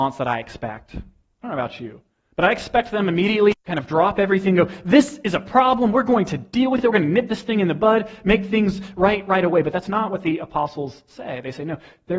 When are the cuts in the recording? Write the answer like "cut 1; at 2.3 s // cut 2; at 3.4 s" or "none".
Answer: none